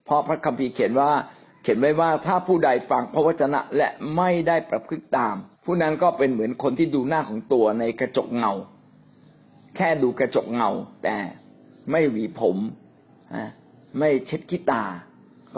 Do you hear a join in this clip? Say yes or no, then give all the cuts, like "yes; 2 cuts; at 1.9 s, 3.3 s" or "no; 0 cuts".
yes; 1 cut; at 5.5 s